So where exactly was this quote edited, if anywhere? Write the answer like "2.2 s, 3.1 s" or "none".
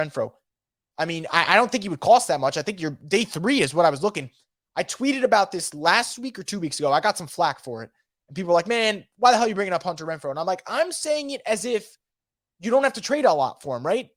0.9 s